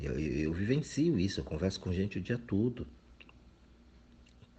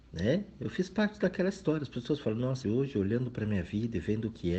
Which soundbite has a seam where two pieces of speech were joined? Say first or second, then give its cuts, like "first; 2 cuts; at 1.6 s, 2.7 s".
second; 1 cut; at 2.6 s